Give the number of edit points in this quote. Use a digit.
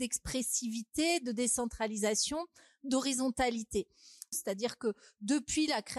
1